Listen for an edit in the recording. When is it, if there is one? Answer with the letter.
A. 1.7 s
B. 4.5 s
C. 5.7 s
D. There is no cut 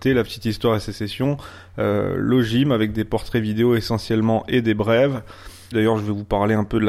C